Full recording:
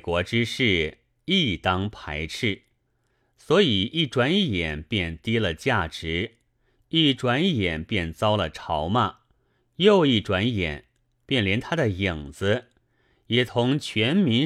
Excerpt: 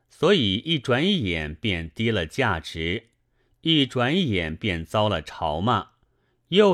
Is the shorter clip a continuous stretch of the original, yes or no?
yes